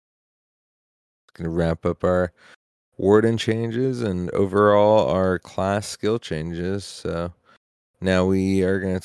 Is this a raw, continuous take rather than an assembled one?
yes; 0 cuts

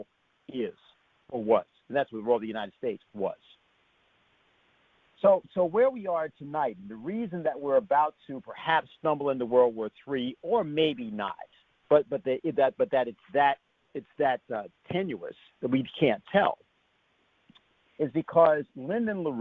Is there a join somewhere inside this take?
yes; 1 cut; at 11.8 s

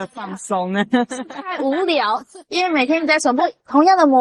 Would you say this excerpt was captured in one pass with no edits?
no; 1 cut; at 2.4 s

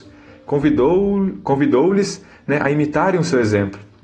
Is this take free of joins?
yes; 0 cuts

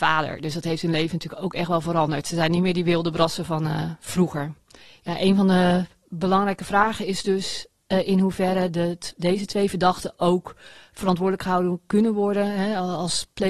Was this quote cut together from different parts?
no; 0 cuts

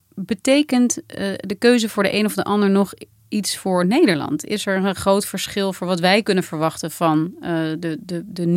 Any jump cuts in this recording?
no; 0 cuts

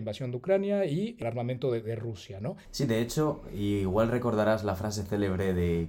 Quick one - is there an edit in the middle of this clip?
yes; 1 cut; at 2.7 s

